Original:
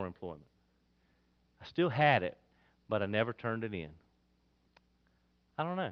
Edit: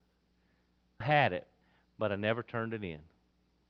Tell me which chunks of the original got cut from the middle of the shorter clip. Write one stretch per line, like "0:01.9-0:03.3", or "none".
0:01.6-0:01.9